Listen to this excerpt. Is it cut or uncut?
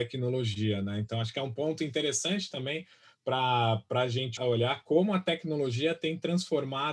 cut